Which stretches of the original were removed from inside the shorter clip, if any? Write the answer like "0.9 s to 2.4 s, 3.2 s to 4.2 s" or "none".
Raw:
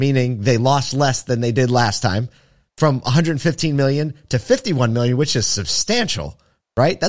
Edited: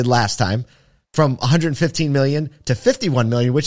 none